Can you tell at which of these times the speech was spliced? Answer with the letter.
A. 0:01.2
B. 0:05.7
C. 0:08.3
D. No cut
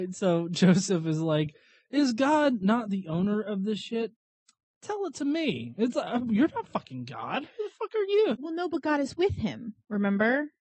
C